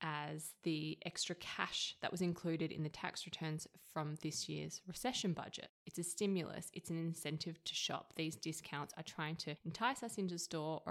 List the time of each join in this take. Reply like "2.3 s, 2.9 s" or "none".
none